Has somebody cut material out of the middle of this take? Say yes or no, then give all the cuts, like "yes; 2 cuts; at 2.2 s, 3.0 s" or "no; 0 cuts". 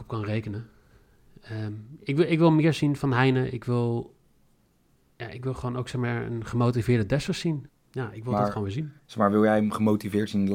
yes; 2 cuts; at 3.0 s, 7.7 s